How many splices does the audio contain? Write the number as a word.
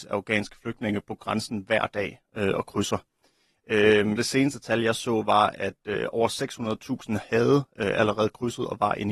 one